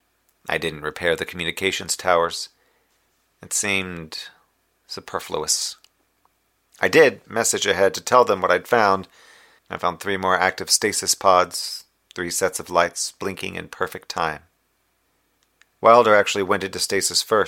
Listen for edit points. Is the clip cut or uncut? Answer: cut